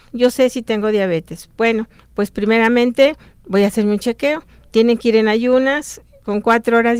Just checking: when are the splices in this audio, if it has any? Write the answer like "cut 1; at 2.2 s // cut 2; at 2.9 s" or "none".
none